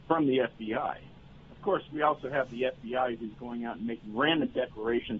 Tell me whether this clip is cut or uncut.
uncut